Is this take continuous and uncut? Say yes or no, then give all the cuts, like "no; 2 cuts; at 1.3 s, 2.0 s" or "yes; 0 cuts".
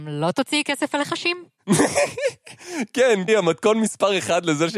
no; 1 cut; at 3.3 s